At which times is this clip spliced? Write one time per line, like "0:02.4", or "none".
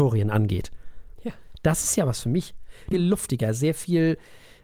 0:01.2
0:02.9